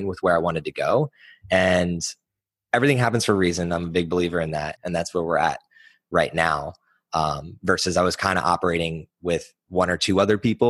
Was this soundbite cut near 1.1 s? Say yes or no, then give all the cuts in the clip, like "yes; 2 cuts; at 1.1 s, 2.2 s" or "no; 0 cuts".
no; 1 cut; at 4.8 s